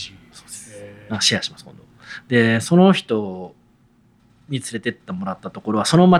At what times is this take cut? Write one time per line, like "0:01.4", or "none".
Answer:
none